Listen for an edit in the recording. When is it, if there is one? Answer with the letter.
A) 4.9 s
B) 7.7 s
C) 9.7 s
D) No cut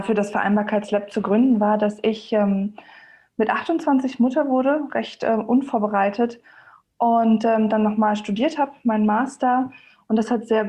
D